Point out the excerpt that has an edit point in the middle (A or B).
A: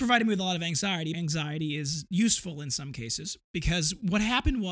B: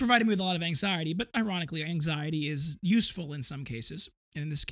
A